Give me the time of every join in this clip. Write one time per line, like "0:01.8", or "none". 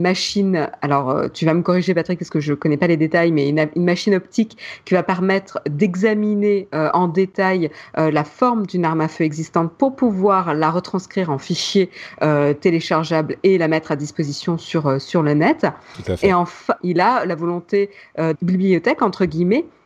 0:16.8
0:18.3